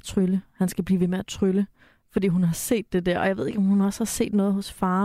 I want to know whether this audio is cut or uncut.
uncut